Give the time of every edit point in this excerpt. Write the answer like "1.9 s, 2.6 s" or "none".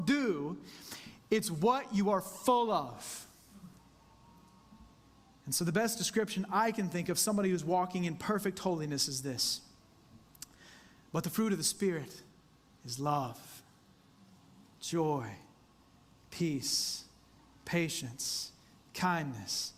none